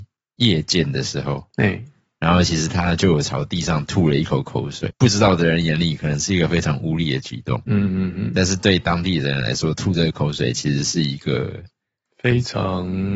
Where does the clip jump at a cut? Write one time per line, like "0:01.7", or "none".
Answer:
0:04.9